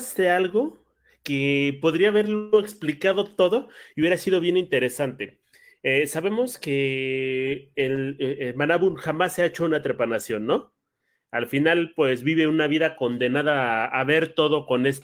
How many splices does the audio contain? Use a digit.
0